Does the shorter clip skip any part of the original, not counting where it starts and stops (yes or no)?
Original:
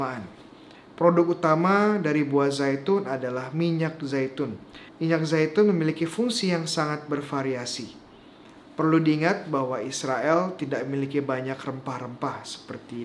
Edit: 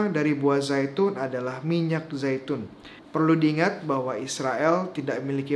yes